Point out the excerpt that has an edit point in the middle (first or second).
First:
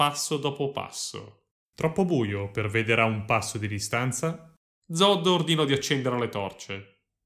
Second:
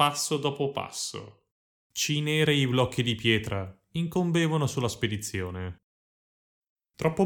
first